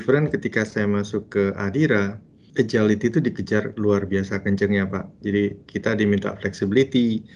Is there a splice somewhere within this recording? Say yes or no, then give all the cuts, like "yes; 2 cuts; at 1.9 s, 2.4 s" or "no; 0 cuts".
yes; 1 cut; at 2.5 s